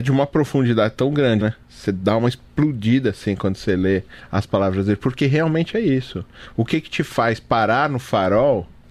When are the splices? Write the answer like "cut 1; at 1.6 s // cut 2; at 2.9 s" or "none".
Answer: cut 1; at 1.4 s